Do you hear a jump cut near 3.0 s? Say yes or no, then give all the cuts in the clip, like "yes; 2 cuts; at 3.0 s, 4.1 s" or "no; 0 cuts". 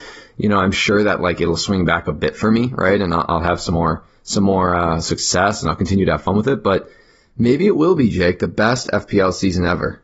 no; 0 cuts